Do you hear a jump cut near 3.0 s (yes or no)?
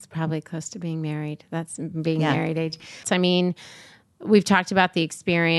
yes